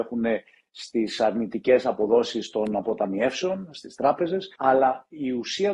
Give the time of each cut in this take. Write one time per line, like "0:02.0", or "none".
0:04.6